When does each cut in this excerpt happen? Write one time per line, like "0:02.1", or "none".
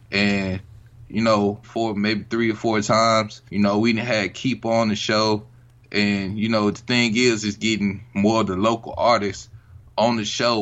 0:01.6
0:03.5